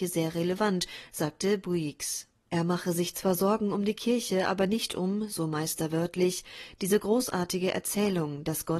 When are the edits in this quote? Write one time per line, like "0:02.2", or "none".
0:02.4